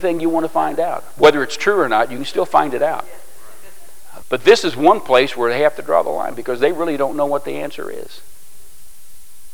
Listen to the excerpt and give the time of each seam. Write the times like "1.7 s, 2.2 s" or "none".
4.2 s